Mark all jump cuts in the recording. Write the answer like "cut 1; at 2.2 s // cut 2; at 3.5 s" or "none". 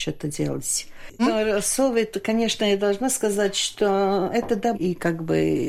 cut 1; at 1.2 s // cut 2; at 4.7 s